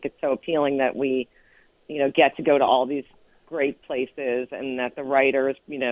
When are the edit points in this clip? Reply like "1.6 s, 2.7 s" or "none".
none